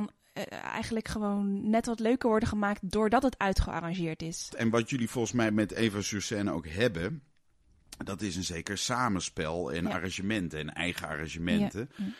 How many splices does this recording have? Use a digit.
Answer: 1